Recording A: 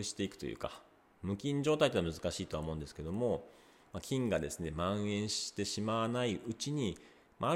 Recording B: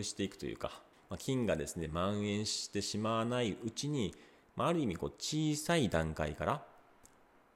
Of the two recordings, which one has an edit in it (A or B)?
B